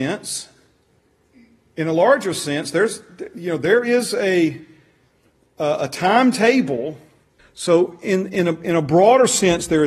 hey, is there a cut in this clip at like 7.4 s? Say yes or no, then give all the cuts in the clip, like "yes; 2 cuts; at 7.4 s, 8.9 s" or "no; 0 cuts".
yes; 1 cut; at 7.4 s